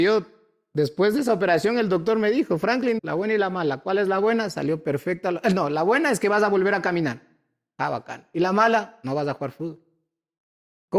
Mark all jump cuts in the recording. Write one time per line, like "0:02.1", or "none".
0:03.0